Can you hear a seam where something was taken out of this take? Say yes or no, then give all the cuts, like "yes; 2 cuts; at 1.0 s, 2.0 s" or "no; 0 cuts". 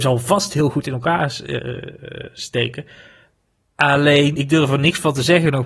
no; 0 cuts